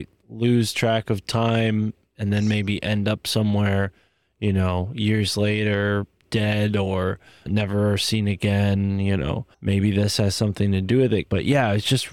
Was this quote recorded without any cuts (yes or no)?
no